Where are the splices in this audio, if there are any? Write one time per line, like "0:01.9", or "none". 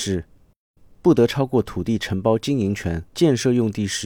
0:03.1